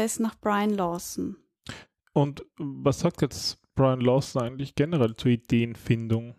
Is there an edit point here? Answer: no; 0 cuts

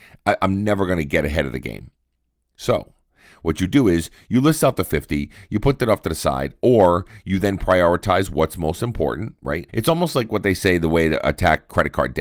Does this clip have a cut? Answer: yes; 1 cut; at 9.7 s

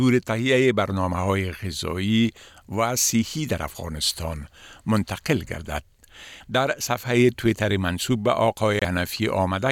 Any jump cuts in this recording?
yes; 1 cut; at 6.4 s

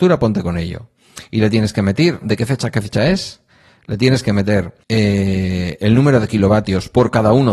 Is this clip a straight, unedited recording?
no; 2 cuts; at 2.2 s, 4.8 s

